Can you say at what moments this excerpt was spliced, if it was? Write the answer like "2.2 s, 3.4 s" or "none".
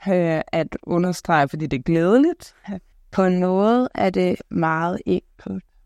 2.9 s